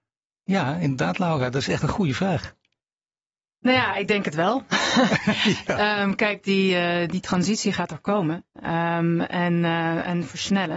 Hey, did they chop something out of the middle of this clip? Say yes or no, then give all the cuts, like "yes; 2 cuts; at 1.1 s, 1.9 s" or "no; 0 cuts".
no; 0 cuts